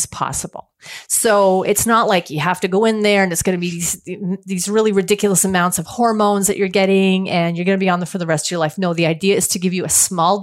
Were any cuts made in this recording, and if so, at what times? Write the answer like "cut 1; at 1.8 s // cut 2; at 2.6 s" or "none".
none